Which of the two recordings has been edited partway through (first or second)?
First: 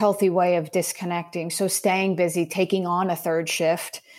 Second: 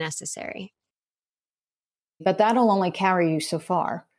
second